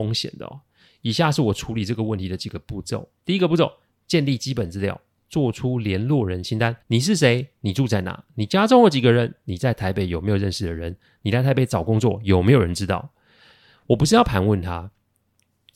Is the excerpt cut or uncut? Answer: cut